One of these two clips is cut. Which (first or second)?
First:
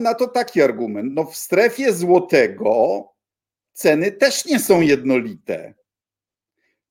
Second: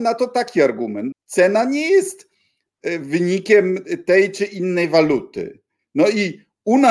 second